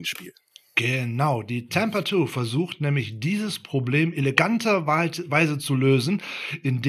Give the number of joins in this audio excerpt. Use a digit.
0